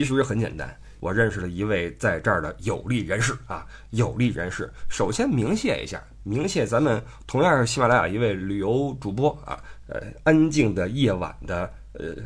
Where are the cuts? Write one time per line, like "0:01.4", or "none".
0:01.0
0:09.8